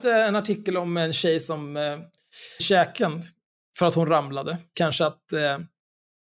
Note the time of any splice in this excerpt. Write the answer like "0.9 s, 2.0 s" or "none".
2.6 s, 4.7 s